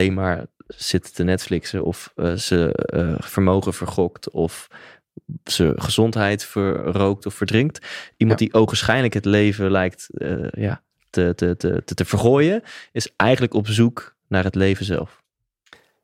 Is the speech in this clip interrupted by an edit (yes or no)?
no